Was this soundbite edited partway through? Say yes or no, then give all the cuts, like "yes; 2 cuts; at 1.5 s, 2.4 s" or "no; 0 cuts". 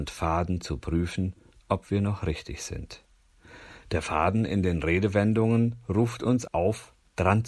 yes; 2 cuts; at 3.8 s, 6.5 s